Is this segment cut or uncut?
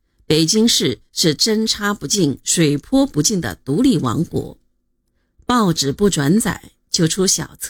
uncut